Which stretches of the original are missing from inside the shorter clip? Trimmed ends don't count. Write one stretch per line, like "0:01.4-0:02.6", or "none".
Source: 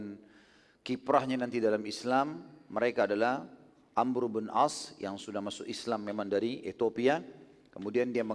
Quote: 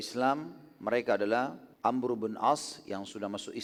0:03.6-0:03.9

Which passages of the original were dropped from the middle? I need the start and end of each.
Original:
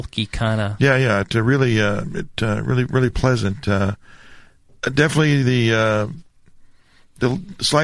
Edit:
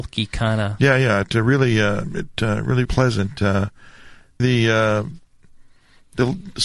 0:02.9-0:03.1
0:04.7-0:05.4

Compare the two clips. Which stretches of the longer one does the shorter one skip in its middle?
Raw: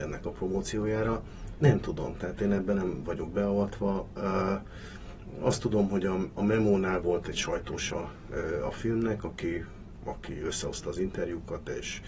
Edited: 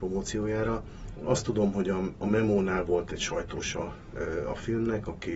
0:01.6-0:05.3

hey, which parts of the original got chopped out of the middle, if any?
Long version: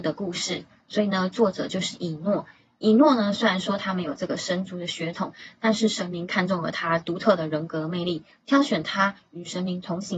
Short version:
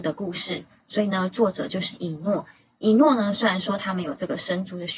none

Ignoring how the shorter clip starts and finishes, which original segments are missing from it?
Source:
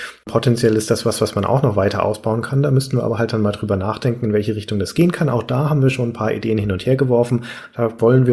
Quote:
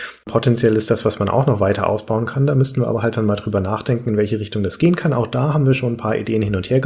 0:01.0-0:01.2

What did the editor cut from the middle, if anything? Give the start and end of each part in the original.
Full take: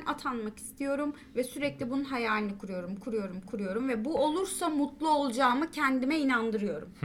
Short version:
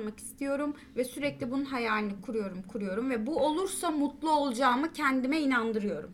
0:02.6-0:03.0

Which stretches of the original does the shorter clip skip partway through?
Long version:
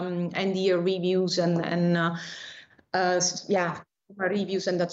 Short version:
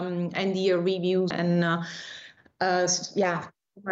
0:01.3-0:01.6

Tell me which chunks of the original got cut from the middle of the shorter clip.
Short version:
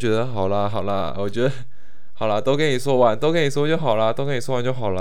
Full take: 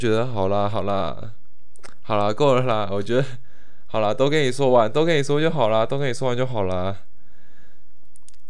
0:01.1-0:02.9

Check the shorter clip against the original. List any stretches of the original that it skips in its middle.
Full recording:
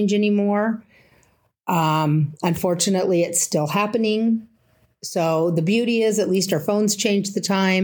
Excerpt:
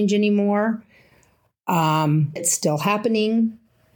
0:02.4-0:03.2

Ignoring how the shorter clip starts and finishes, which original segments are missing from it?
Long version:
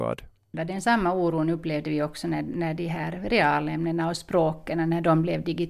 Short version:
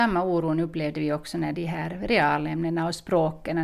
0:02.4-0:02.8

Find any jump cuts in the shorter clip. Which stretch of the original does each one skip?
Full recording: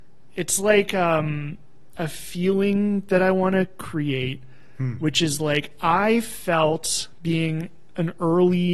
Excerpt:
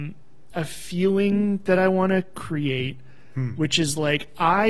none

